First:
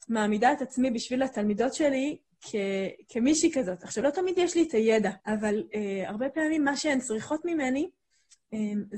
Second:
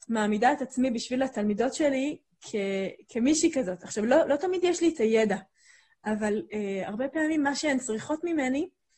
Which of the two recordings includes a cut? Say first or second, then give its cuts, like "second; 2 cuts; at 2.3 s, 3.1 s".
first; 2 cuts; at 4.0 s, 5.2 s